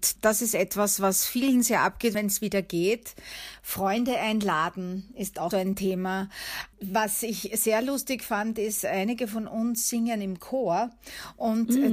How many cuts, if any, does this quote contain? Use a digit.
2